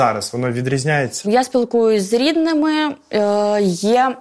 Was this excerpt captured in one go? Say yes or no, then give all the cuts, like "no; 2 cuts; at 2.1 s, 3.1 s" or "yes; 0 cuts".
no; 1 cut; at 1.2 s